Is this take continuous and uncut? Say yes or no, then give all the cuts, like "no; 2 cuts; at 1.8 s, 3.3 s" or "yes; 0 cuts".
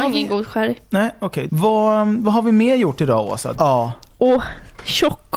no; 2 cuts; at 1.5 s, 3.5 s